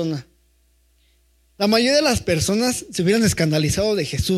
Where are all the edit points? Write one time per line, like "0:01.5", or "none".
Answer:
none

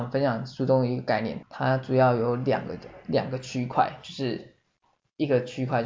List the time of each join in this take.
0:01.4

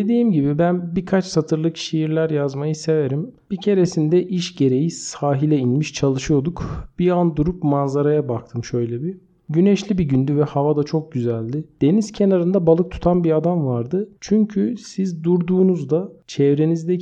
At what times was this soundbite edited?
0:14.2

